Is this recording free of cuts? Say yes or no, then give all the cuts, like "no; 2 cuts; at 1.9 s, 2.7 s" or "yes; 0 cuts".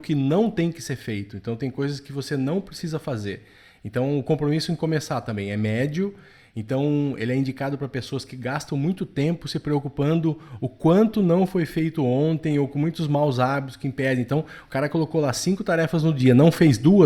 yes; 0 cuts